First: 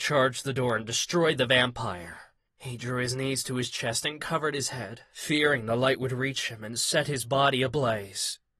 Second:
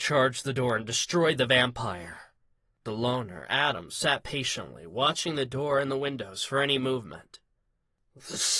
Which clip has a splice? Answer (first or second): first